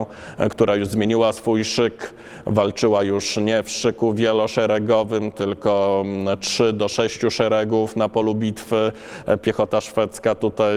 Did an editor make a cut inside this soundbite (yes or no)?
no